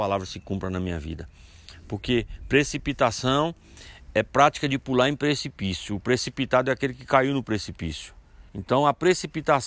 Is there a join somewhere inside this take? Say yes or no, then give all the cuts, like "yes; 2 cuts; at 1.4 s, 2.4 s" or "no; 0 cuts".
yes; 1 cut; at 8.5 s